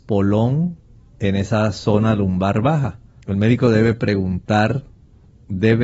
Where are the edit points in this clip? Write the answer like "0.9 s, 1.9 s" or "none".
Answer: 3.2 s